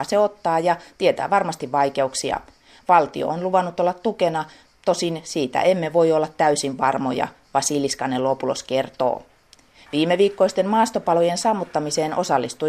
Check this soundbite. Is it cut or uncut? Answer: uncut